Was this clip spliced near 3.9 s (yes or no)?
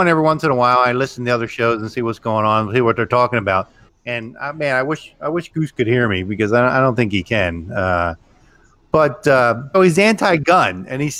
yes